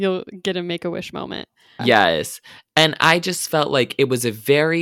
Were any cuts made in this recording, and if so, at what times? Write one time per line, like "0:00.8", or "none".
0:01.8